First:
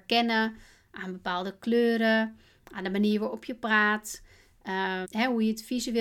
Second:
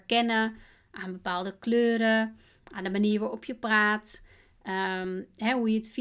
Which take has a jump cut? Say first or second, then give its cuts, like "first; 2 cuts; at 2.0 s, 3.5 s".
first; 1 cut; at 5.0 s